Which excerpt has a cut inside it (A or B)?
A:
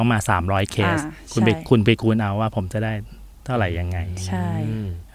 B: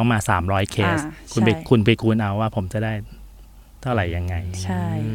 A